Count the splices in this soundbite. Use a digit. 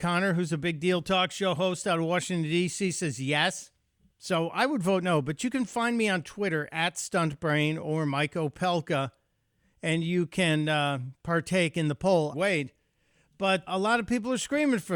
3